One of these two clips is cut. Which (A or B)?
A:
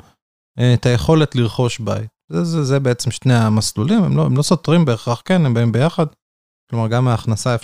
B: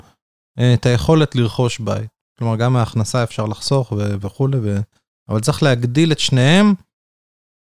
B